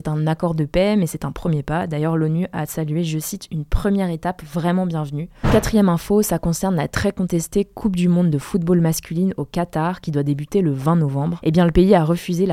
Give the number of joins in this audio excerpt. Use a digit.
1